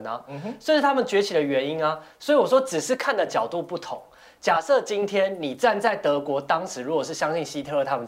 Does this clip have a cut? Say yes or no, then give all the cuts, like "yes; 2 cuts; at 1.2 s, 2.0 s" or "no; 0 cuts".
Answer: no; 0 cuts